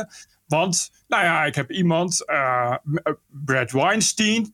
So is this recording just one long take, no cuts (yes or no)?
yes